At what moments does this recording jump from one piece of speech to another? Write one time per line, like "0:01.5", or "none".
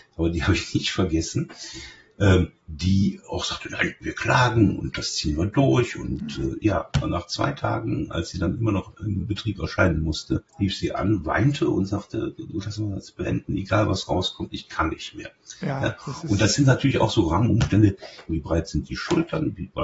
0:10.5
0:18.3

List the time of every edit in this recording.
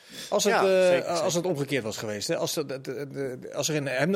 none

